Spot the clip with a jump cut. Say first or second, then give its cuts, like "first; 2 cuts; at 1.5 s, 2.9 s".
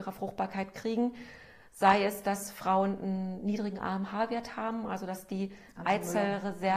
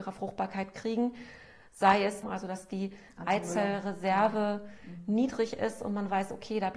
second; 1 cut; at 2.2 s